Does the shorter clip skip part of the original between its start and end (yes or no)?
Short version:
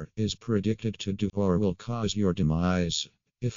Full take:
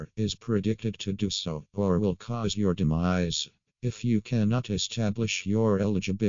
yes